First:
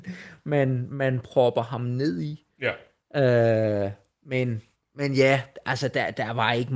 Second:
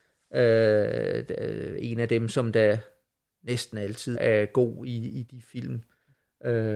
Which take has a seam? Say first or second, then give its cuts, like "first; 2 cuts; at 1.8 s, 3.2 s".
second; 1 cut; at 4.1 s